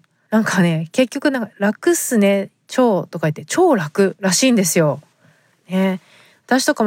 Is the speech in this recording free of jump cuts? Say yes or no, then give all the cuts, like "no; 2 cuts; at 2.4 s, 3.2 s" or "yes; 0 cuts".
no; 1 cut; at 5.5 s